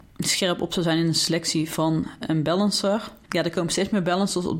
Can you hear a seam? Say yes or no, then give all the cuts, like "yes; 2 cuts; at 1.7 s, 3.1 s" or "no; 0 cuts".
yes; 1 cut; at 3.2 s